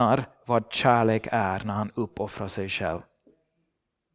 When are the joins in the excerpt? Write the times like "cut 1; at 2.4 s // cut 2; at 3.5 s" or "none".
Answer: none